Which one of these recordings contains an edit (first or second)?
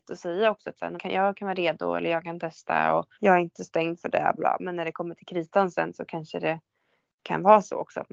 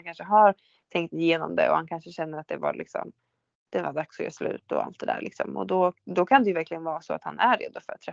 first